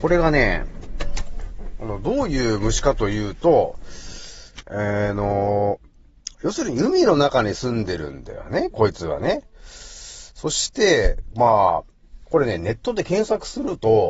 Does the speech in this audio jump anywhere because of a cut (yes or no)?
yes